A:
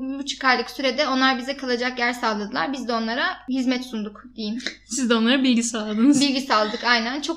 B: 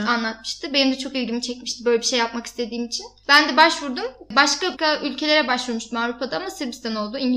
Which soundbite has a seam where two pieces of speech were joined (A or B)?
B